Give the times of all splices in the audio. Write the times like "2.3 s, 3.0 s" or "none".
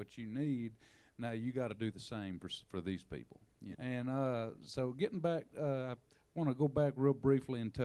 3.7 s